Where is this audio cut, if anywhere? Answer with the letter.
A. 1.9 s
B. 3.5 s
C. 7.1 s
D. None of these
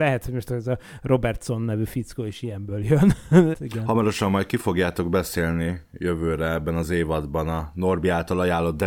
B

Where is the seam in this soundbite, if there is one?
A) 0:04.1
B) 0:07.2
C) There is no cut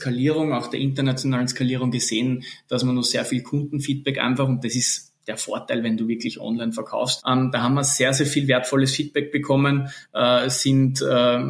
B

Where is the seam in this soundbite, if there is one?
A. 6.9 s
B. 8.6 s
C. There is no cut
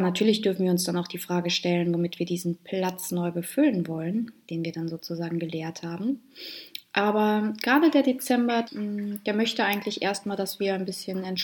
B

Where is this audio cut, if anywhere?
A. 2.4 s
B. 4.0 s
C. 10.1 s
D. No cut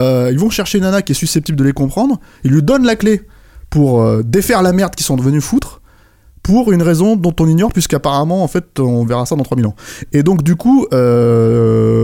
D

